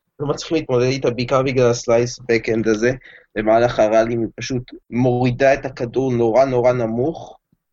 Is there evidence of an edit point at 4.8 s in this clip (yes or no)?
yes